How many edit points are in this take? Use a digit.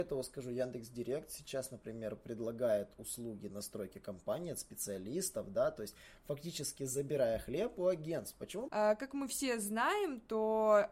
1